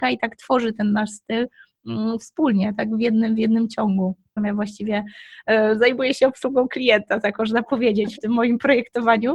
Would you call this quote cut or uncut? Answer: cut